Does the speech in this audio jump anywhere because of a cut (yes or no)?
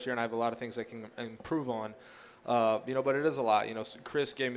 no